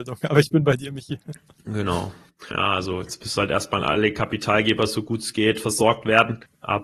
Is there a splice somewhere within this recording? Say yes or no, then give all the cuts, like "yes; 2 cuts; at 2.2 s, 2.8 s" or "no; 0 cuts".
yes; 1 cut; at 2.5 s